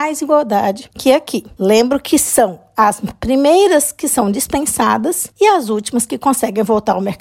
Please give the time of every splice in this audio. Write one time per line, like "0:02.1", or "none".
0:01.6

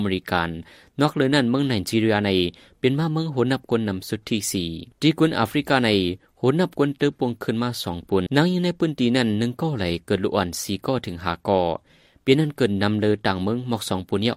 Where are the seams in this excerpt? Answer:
0:04.9
0:08.3

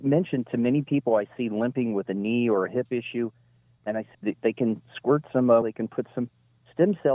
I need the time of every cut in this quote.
0:04.1
0:05.6

